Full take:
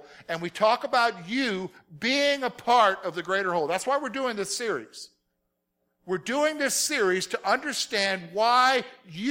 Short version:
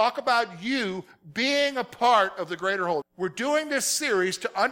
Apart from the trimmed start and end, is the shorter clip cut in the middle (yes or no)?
yes